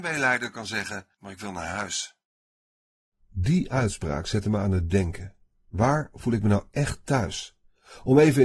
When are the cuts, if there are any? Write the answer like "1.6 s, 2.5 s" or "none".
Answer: 1.1 s